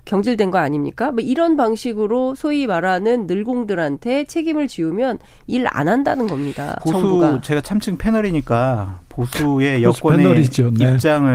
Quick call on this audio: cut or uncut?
cut